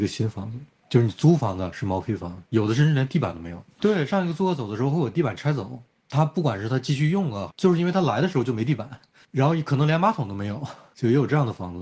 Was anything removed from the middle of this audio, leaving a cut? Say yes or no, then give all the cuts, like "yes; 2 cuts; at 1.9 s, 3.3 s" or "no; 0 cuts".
yes; 2 cuts; at 3.8 s, 7.5 s